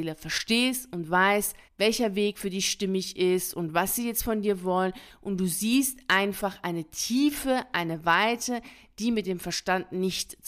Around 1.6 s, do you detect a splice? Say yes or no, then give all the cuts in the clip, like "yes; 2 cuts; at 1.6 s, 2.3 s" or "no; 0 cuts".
yes; 1 cut; at 1.6 s